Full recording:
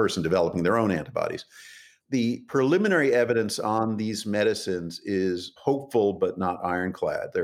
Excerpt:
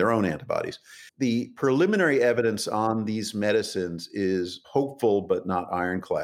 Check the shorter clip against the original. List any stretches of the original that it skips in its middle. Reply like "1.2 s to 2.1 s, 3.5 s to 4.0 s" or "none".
1.7 s to 2.0 s

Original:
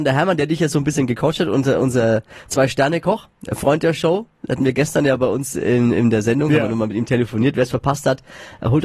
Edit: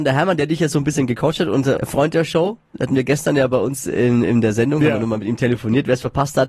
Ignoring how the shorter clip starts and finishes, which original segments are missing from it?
1.8 s to 3.5 s

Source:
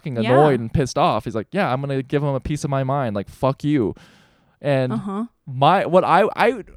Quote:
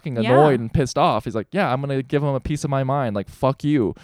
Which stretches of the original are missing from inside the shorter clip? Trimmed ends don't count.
none

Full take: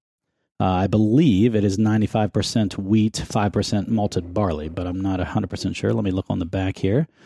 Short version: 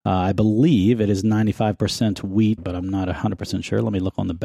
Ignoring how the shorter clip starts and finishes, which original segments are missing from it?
3.1 s to 4.7 s

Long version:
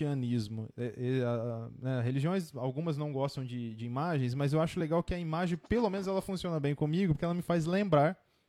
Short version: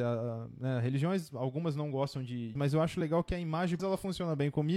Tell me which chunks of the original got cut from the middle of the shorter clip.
3.8 s to 4.3 s, 5.6 s to 6.0 s

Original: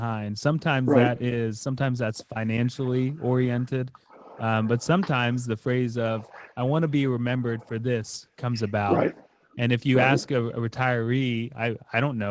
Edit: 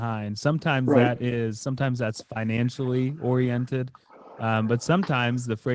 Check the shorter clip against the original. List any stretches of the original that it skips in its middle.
none

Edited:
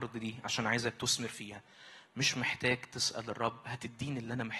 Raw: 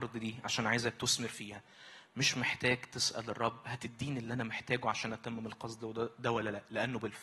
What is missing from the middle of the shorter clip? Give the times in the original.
none

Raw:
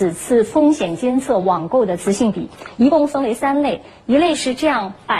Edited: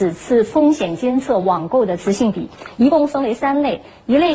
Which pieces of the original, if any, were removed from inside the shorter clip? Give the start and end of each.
none

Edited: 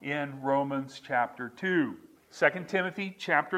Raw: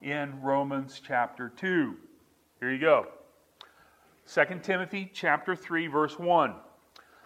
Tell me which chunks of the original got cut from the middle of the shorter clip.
2.1 s to 4.1 s

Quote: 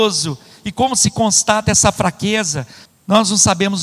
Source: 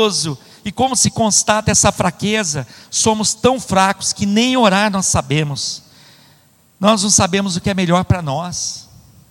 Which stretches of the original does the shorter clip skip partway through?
2.9 s to 6.6 s

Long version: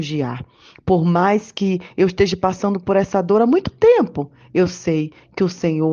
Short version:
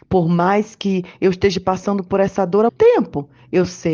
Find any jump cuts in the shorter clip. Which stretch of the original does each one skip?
3.5 s to 3.7 s

